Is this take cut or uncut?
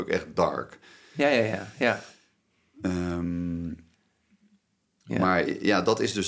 uncut